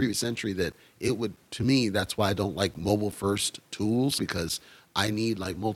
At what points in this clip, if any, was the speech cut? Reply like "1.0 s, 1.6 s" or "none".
4.2 s